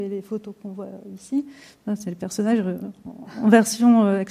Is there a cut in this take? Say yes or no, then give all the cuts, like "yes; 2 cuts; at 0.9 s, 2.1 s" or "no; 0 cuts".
no; 0 cuts